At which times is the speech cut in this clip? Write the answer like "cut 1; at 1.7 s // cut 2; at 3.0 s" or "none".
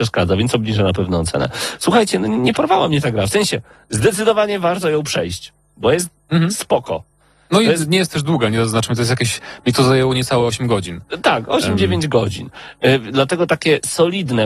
none